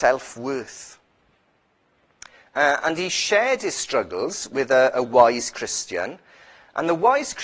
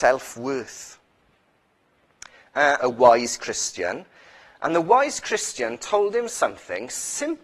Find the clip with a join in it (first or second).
second